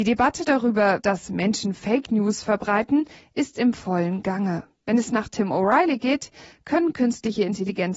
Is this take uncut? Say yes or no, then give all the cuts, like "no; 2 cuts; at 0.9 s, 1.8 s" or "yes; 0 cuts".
no; 1 cut; at 1.0 s